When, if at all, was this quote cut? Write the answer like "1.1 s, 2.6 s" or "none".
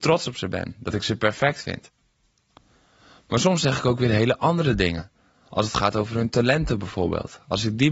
none